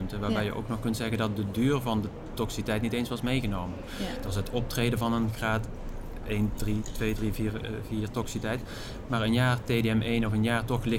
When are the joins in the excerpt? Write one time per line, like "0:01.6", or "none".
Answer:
none